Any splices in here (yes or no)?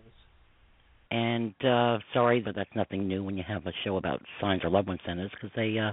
yes